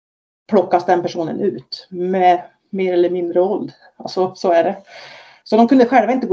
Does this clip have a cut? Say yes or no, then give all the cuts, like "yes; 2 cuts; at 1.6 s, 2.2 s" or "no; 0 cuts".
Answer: no; 0 cuts